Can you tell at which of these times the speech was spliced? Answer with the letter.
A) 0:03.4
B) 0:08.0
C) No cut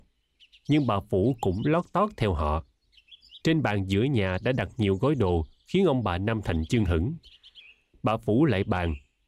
A